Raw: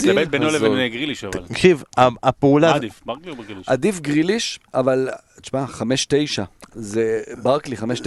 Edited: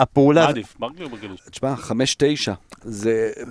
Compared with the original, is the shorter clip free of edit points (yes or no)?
no